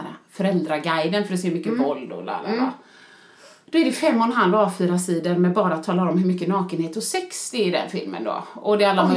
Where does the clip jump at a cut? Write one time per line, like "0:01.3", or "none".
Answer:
none